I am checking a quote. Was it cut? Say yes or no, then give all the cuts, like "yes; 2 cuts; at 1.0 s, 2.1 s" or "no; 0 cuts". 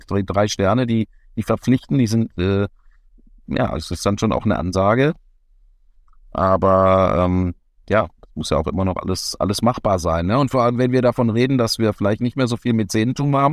no; 0 cuts